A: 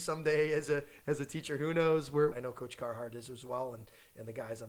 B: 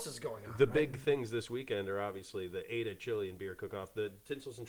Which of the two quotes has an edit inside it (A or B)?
A